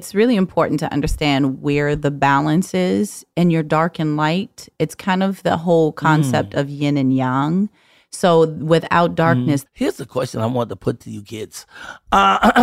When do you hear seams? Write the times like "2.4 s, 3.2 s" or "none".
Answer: 9.7 s

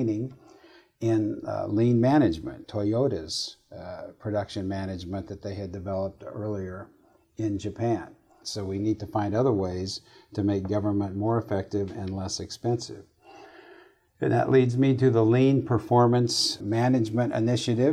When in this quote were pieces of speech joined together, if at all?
2.6 s, 8.4 s, 16.6 s

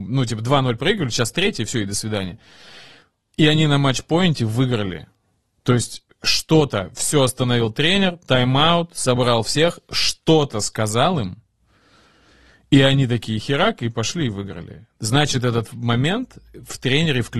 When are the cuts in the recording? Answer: none

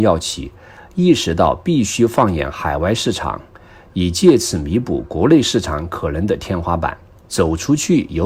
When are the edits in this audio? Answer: 7.3 s

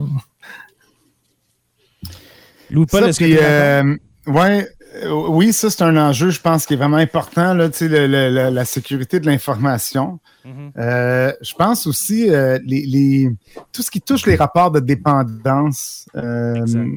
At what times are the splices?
none

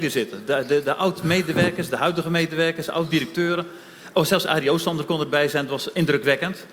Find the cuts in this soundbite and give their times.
none

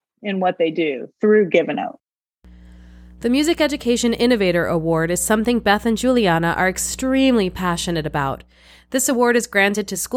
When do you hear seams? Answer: none

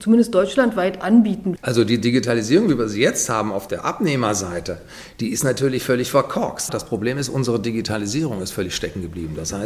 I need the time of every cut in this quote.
1.6 s, 6.7 s

